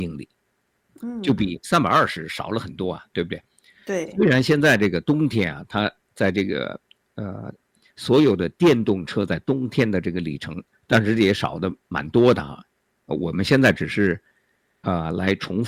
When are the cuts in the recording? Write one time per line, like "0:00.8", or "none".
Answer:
0:10.7